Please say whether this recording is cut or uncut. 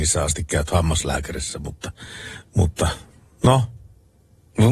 uncut